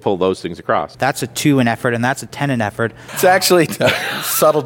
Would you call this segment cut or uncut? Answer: cut